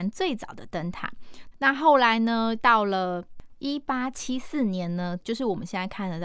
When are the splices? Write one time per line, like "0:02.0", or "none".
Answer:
0:01.5
0:05.2